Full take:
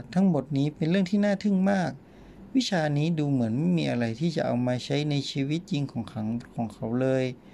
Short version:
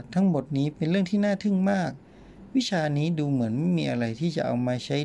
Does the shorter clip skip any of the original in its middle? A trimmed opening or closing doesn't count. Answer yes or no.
no